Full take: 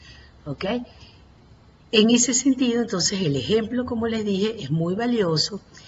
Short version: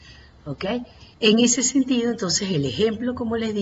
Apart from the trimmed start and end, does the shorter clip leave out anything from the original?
yes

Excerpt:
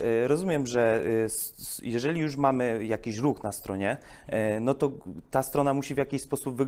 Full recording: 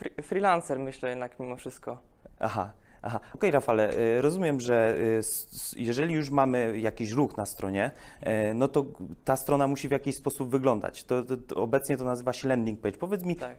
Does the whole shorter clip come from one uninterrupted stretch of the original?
yes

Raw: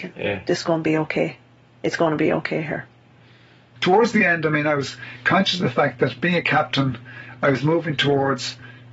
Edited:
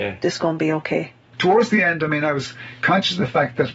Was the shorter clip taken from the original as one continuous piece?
no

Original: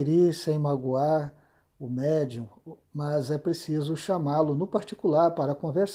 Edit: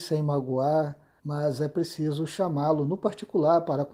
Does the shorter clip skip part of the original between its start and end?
yes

